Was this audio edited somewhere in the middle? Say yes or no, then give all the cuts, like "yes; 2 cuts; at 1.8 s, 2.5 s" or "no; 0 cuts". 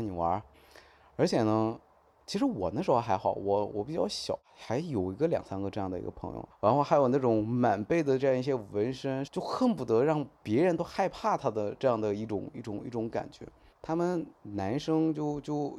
yes; 3 cuts; at 6.5 s, 9.3 s, 13.7 s